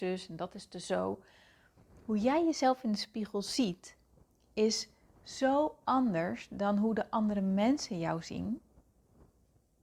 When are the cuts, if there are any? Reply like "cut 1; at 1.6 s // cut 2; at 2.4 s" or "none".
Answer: none